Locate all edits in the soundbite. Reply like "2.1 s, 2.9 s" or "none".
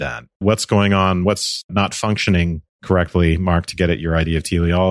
none